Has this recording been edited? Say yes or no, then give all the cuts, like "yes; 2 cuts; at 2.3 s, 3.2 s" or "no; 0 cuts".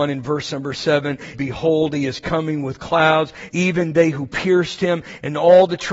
yes; 2 cuts; at 1.3 s, 3.5 s